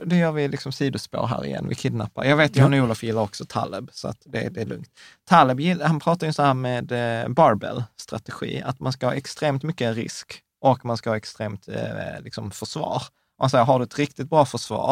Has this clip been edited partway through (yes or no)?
no